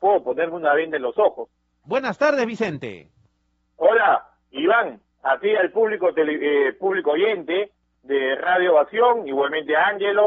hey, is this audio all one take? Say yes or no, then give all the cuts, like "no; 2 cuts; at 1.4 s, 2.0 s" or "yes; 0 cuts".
no; 1 cut; at 1.8 s